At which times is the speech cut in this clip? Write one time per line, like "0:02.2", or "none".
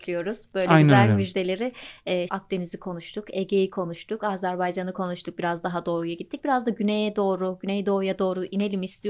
0:02.3